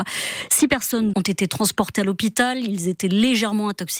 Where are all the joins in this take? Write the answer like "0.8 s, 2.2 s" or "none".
1.1 s